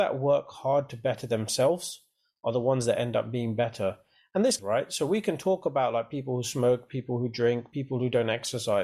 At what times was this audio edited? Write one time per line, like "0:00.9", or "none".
0:04.6
0:07.7